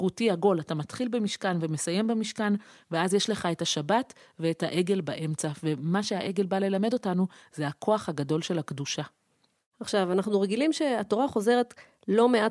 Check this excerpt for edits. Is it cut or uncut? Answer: uncut